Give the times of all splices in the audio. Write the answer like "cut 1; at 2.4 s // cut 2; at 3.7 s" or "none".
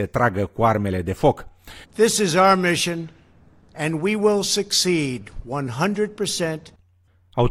cut 1; at 1.8 s